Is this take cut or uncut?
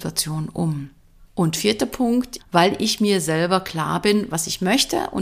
cut